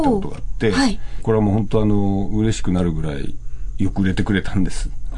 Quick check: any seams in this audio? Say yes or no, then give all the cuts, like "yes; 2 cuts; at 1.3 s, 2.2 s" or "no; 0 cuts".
yes; 1 cut; at 1.2 s